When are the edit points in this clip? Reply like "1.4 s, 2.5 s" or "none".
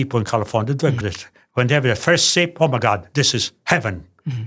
1.0 s